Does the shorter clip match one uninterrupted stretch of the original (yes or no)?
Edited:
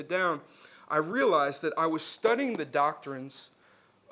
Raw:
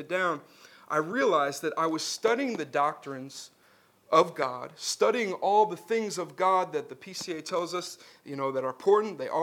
yes